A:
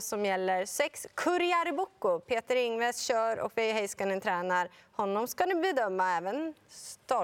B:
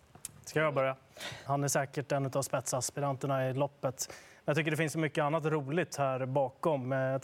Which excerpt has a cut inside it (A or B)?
B